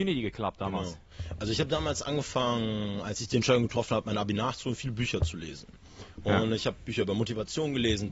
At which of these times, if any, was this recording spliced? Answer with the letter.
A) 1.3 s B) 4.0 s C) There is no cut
C